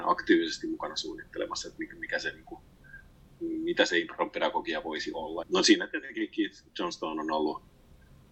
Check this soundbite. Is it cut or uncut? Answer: cut